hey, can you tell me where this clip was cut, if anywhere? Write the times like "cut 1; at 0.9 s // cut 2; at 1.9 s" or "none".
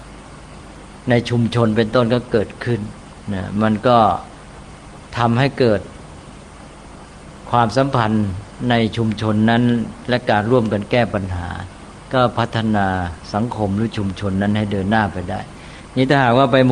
none